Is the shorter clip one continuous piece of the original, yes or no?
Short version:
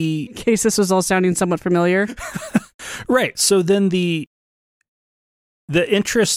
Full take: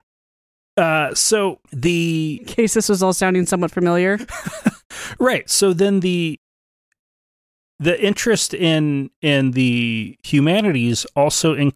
yes